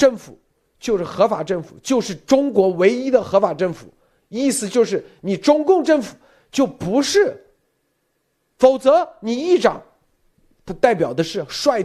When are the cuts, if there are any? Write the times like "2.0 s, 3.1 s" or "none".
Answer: 10.5 s